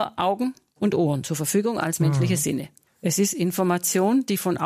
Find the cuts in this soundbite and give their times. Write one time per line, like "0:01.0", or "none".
0:02.9